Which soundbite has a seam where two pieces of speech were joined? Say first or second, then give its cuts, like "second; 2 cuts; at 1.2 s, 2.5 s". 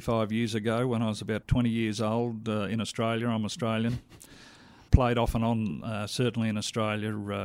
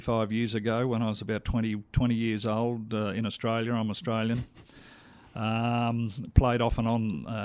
first; 2 cuts; at 1.4 s, 4.9 s